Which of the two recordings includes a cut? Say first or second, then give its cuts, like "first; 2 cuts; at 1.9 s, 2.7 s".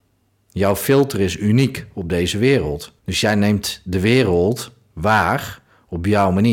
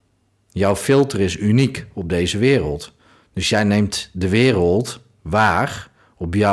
first; 1 cut; at 3.0 s